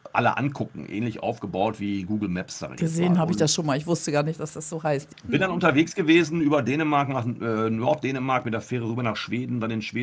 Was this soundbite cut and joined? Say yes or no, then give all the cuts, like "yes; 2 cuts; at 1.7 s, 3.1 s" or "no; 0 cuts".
no; 0 cuts